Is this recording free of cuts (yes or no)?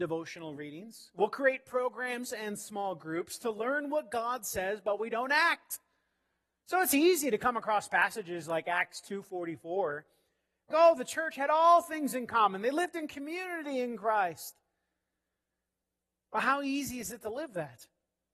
no